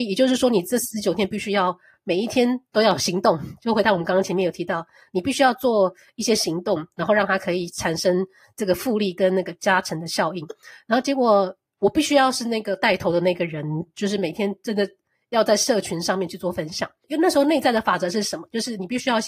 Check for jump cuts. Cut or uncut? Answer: uncut